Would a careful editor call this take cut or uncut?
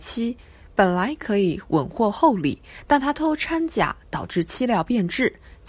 cut